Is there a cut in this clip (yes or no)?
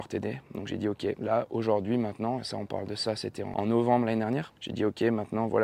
no